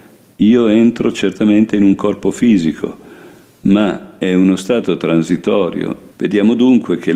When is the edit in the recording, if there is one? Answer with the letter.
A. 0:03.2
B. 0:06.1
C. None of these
B